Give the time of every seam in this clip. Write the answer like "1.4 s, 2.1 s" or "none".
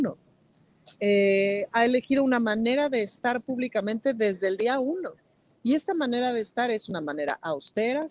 none